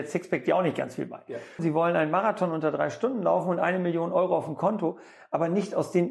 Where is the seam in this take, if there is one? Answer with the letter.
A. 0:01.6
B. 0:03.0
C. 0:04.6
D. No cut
A